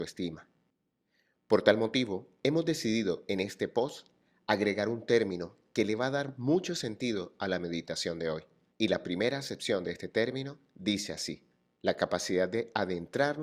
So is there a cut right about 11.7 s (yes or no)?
yes